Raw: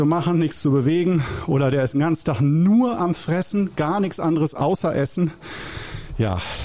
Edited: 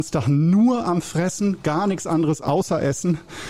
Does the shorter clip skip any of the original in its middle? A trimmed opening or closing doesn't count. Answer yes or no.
no